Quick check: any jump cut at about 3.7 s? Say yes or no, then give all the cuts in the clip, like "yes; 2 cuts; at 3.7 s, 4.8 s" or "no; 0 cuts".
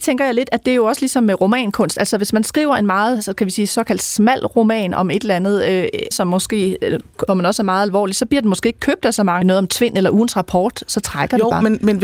no; 3 cuts; at 6.1 s, 7.3 s, 9.4 s